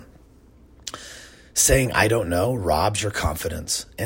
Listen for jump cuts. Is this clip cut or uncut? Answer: uncut